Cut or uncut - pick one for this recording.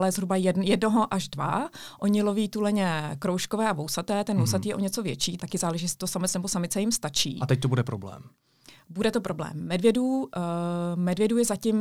cut